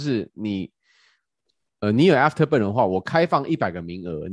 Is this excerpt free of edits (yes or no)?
yes